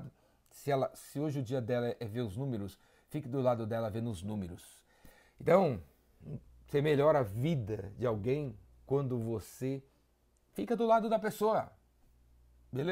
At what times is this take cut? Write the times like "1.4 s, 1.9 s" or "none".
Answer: none